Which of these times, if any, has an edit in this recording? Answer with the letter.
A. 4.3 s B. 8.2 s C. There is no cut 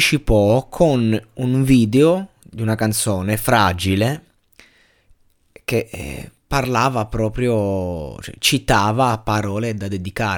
C